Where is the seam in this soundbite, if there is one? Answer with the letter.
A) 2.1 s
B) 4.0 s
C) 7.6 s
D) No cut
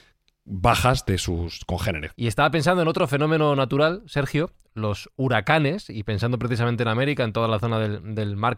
A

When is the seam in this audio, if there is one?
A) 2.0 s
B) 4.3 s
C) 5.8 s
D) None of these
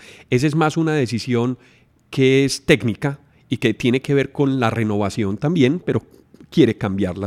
C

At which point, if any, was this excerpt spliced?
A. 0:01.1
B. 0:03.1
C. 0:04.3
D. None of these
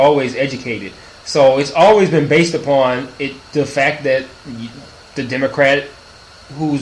D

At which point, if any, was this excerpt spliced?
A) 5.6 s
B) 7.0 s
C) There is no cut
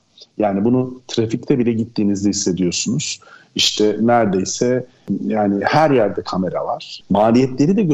B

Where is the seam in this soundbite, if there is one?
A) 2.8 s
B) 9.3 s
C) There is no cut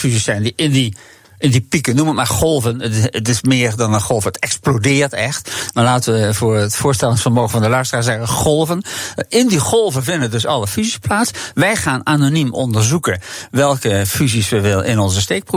C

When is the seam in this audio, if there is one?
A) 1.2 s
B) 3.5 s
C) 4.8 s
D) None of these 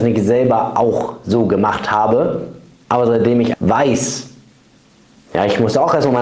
B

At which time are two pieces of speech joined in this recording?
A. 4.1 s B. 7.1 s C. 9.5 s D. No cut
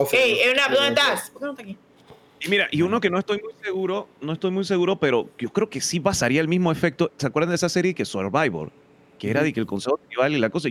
B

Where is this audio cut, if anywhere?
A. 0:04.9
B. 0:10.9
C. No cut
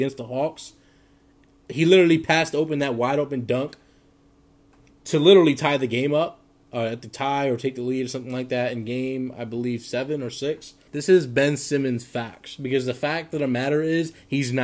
B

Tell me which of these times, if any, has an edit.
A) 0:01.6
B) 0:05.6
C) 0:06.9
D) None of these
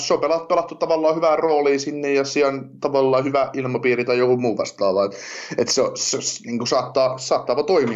D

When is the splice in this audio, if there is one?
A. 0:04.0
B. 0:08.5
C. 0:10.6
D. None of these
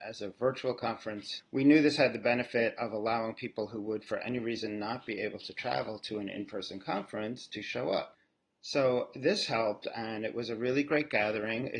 D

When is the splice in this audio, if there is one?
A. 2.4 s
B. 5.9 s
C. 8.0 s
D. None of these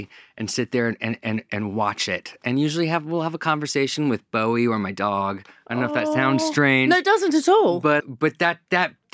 C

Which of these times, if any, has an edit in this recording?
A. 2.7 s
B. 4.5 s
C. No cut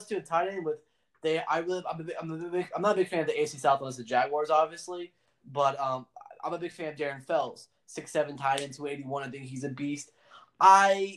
C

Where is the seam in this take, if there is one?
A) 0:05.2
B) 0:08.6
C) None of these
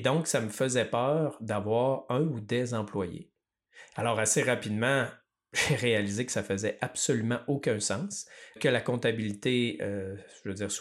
B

